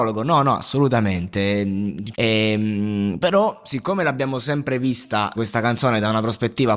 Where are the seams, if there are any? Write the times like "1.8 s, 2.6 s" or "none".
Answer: 2.1 s, 5.4 s

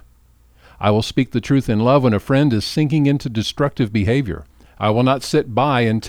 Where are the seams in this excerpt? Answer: none

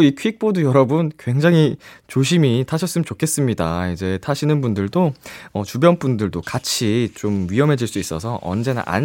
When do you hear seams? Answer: none

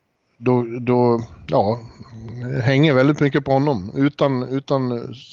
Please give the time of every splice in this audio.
none

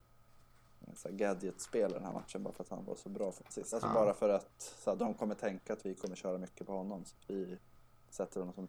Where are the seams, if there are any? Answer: none

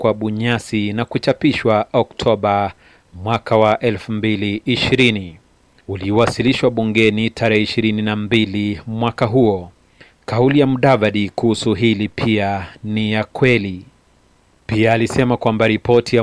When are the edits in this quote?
10.1 s

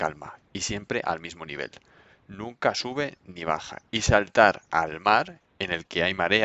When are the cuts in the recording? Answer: none

